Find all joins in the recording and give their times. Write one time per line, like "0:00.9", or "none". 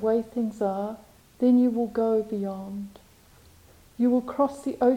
none